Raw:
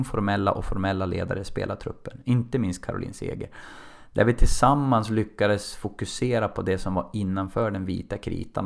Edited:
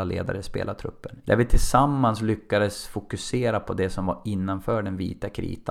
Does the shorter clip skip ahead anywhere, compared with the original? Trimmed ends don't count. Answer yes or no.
yes